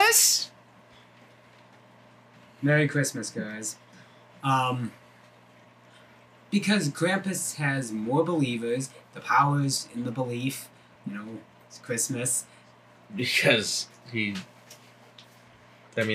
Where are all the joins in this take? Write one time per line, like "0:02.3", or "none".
0:11.0
0:13.0